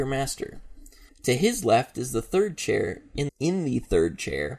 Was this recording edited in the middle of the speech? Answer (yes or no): yes